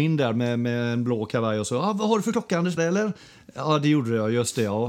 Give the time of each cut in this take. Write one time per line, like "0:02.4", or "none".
0:02.8